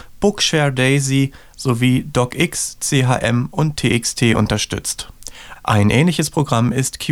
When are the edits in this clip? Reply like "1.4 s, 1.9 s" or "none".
5.5 s

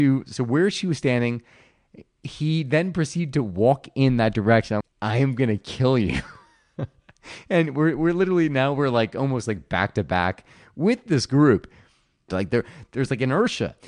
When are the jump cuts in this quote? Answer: 4.8 s, 12.3 s

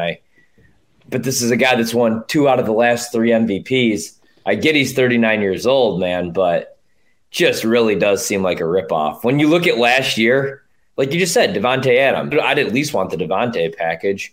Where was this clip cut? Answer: 10.9 s, 12.3 s

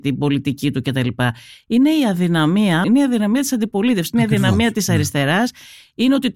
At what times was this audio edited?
2.8 s

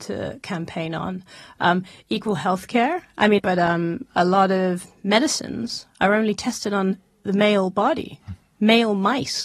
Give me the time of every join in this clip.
3.4 s

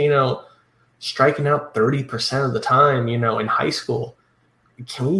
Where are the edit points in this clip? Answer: none

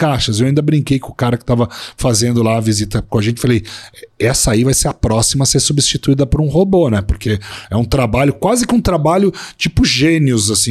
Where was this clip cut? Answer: none

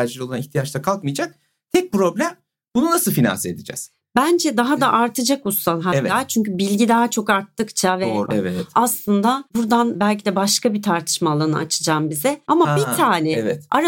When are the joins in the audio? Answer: 8.3 s, 9.5 s, 12.4 s

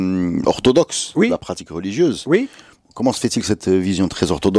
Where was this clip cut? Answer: none

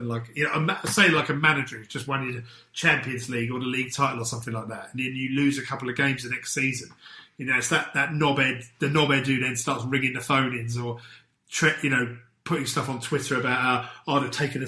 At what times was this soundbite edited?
none

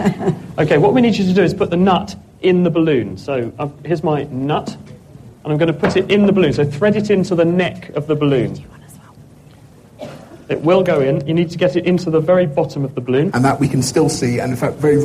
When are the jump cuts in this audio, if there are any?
13.3 s

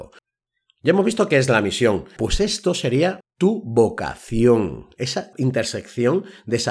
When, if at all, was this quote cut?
2.2 s, 3.2 s, 5.3 s

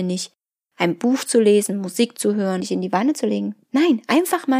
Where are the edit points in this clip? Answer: 2.6 s

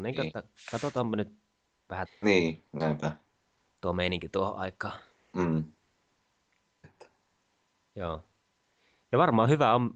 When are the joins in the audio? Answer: 2.1 s, 6.8 s

